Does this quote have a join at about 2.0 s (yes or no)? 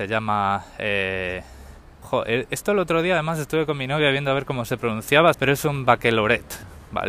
yes